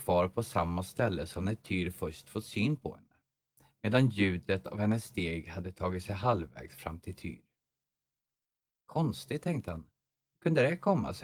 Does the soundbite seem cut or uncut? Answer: uncut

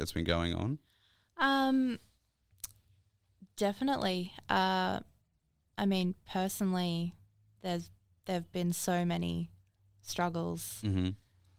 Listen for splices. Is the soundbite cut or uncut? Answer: uncut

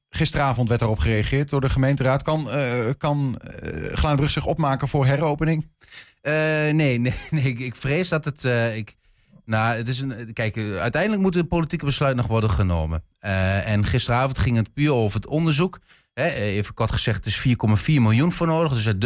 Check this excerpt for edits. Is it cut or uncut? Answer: uncut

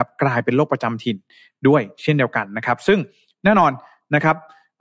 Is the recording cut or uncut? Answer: uncut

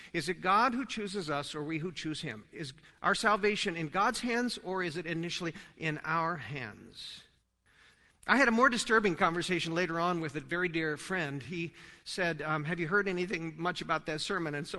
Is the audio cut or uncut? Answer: uncut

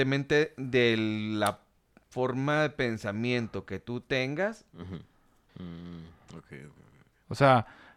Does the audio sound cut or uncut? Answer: cut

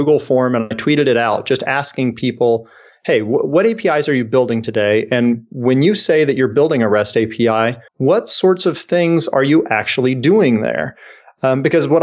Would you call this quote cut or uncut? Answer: cut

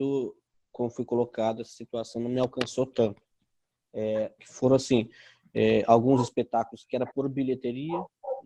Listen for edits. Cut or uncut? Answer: cut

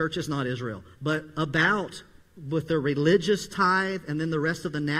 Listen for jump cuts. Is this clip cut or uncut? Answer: cut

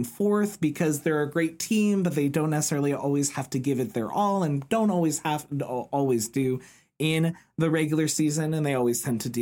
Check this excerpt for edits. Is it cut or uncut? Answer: uncut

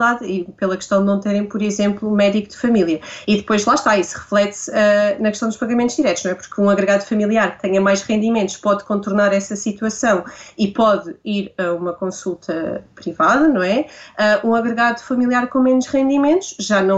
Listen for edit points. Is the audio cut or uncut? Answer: uncut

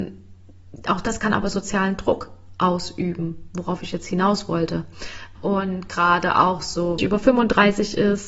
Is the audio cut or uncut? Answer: cut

